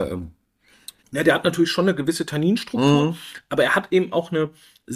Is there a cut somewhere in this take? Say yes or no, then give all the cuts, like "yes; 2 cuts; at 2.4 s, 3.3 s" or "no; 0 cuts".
yes; 1 cut; at 1.0 s